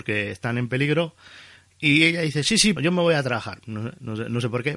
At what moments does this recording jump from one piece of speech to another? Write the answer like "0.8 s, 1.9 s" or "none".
2.8 s